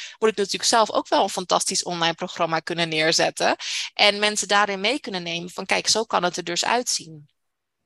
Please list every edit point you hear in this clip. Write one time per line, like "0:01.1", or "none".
none